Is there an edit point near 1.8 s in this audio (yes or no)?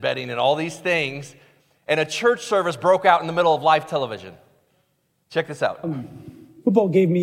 no